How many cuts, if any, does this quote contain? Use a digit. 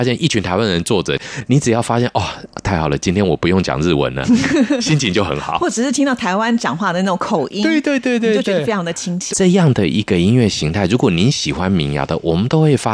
1